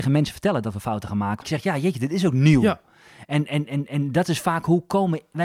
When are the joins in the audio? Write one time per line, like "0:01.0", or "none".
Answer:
0:01.4